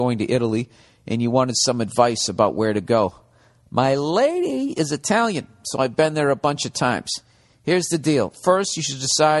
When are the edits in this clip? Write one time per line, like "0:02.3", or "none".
none

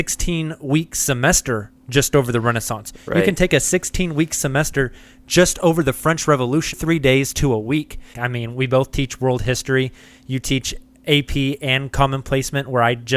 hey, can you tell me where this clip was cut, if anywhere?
0:06.7
0:08.1

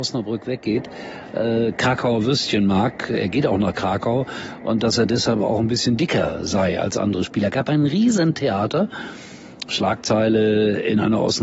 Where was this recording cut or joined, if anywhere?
none

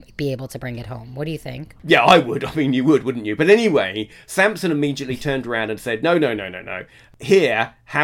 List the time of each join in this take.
0:01.8

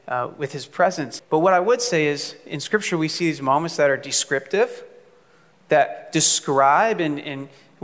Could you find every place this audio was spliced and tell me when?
0:01.2

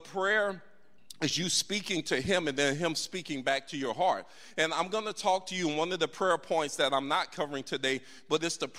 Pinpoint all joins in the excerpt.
none

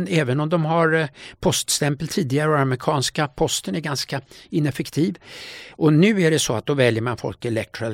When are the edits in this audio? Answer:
0:05.7

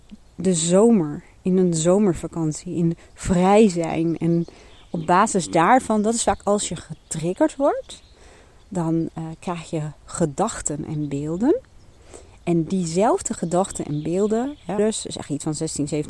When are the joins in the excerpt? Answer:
0:14.8

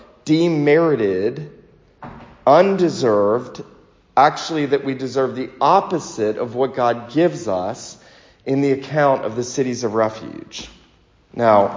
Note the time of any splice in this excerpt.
none

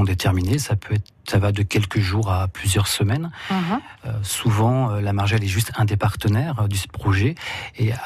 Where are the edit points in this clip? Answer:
none

